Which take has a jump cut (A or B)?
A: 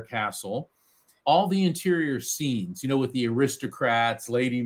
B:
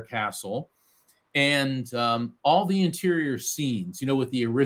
A